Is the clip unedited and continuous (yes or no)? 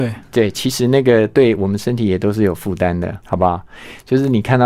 no